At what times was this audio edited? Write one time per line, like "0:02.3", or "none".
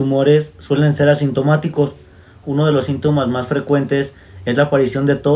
0:02.4